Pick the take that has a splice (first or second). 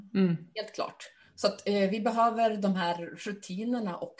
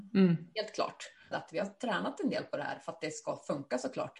second